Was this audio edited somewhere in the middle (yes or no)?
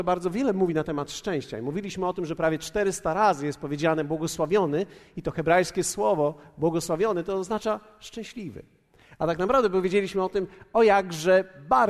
no